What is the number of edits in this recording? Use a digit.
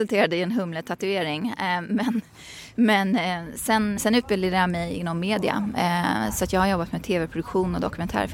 1